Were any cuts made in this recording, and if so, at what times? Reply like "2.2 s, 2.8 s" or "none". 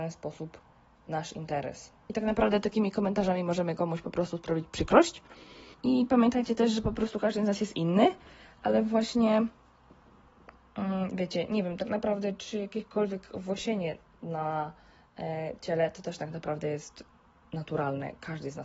5.7 s